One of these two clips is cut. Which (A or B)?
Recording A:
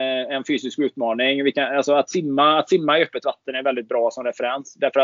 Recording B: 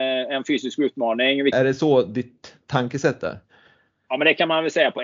B